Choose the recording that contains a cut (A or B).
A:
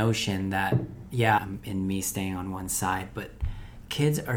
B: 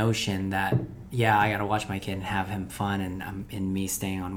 A